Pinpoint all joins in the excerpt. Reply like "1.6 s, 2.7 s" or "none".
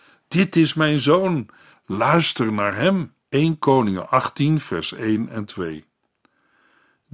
1.7 s, 3.2 s